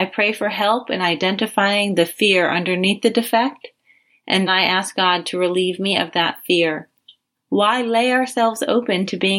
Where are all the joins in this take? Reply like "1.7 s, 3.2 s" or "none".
4.5 s, 7.4 s

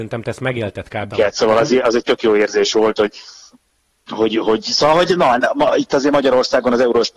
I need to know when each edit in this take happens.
1.1 s

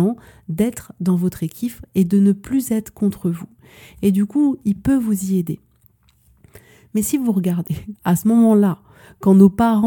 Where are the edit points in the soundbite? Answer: 4.6 s, 7.9 s

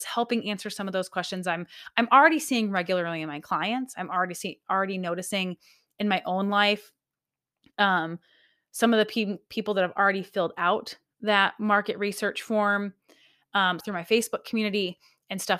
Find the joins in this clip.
13.8 s

